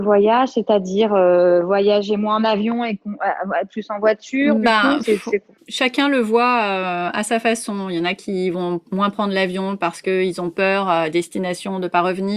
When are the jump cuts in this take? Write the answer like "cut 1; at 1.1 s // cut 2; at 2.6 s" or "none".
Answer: none